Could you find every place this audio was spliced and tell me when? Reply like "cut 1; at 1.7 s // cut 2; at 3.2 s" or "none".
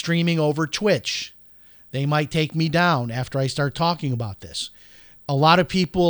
none